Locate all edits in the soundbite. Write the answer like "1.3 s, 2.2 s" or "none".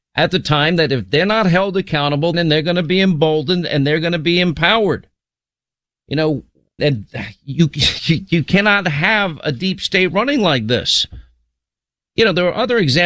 2.3 s, 6.8 s